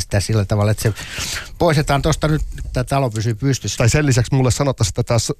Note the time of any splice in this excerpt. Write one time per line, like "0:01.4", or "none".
0:02.6
0:03.8